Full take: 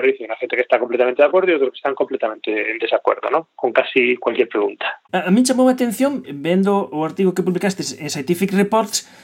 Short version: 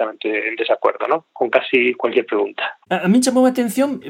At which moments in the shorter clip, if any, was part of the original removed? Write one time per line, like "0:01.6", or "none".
none